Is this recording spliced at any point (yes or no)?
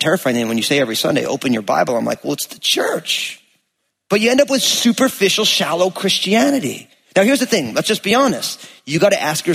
no